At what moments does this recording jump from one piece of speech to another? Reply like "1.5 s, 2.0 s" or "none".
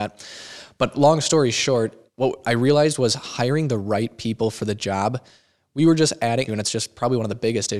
2.1 s, 6.5 s